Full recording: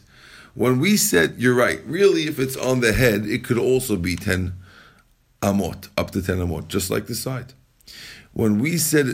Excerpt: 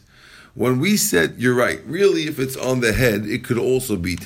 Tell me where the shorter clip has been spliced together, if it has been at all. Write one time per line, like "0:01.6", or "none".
none